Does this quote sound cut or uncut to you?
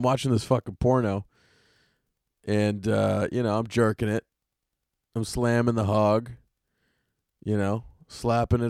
uncut